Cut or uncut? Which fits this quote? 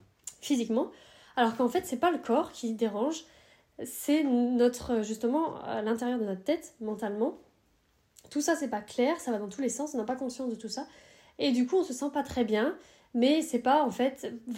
uncut